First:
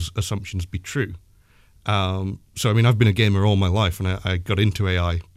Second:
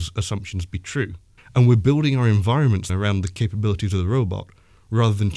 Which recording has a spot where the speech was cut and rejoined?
second; 2 cuts; at 1.4 s, 2.9 s

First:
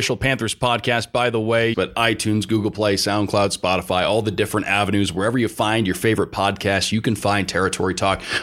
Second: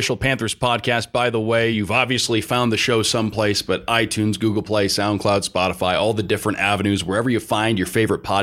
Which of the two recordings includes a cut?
first; 1 cut; at 1.7 s

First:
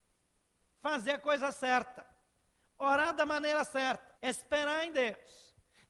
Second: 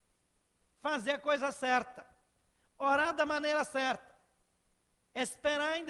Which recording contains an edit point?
first; 1 cut; at 4.2 s

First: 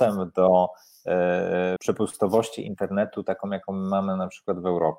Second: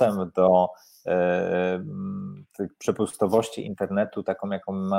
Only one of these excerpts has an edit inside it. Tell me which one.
first; 1 cut; at 1.8 s

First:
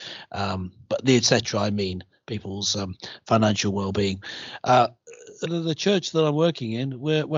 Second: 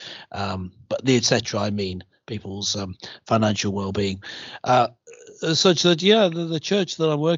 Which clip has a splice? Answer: first; 1 cut; at 5.5 s

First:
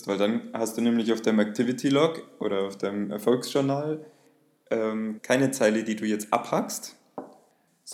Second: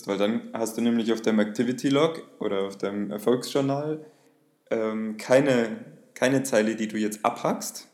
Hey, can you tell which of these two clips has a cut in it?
first; 1 cut; at 5.2 s

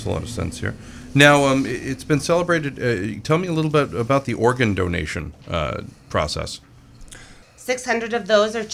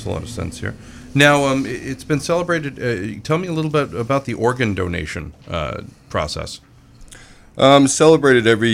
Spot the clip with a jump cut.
first; 1 cut; at 7.4 s

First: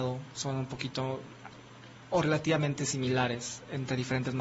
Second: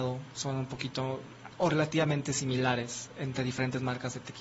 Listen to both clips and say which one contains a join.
second; 1 cut; at 1.5 s

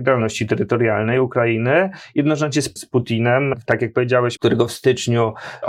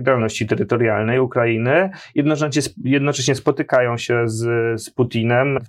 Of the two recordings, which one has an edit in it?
first; 2 cuts; at 2.8 s, 4.4 s

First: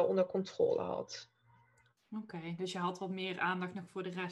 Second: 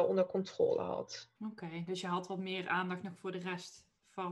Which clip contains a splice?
second; 1 cut; at 1.4 s

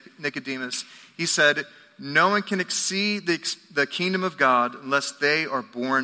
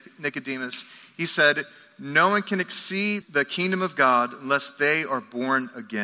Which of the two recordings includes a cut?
second; 1 cut; at 3.2 s

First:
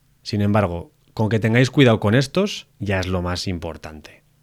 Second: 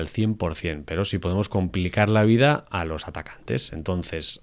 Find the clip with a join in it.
first; 1 cut; at 2.7 s

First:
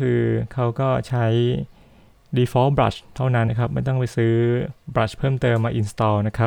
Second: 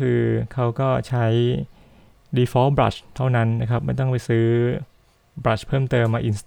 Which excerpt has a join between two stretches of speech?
first; 2 cuts; at 3.5 s, 4.8 s

